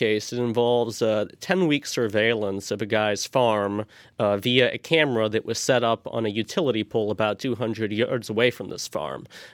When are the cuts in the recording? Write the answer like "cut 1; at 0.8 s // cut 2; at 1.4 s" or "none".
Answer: none